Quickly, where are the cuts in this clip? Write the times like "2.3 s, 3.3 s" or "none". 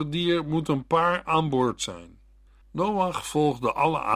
2.6 s